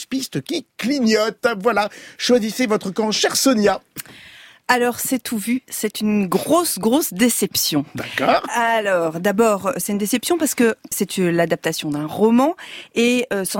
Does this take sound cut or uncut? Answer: cut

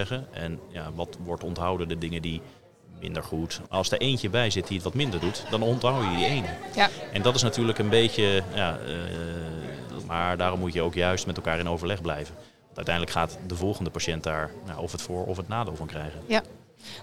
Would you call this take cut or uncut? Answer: cut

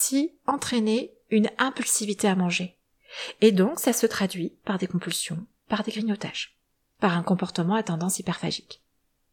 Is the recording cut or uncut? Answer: uncut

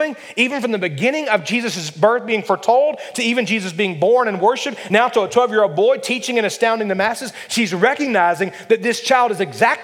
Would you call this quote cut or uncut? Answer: uncut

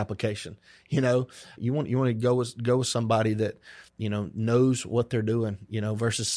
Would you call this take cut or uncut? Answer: cut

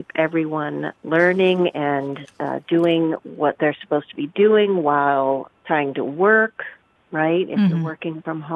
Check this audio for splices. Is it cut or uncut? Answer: cut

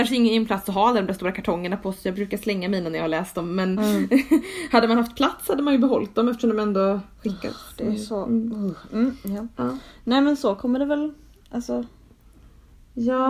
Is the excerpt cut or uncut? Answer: cut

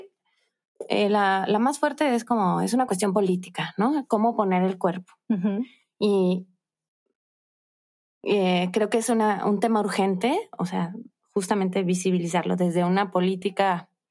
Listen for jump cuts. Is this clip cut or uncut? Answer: uncut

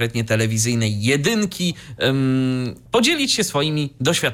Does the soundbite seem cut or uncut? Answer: cut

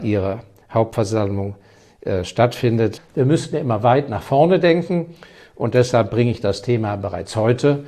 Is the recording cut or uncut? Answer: cut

